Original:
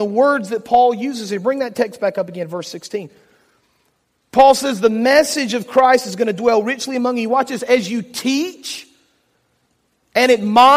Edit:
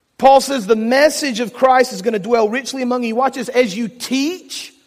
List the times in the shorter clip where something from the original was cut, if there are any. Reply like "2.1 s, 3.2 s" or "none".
none